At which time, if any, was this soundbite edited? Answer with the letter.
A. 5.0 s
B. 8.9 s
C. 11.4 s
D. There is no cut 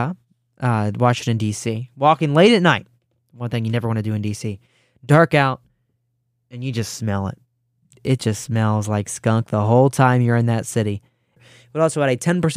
C